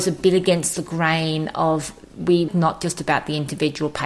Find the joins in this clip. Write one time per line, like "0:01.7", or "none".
0:02.5